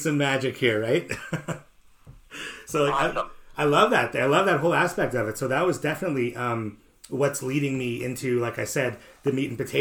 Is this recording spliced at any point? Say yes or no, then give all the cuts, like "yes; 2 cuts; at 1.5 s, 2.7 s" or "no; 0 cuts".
no; 0 cuts